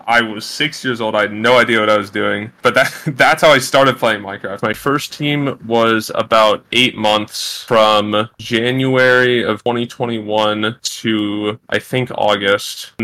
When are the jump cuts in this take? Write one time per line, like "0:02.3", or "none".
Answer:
0:04.6